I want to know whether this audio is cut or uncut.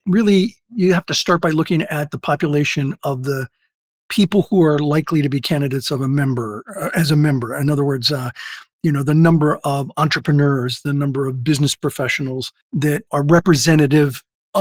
cut